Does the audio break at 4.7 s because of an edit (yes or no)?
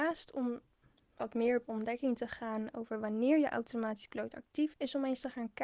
yes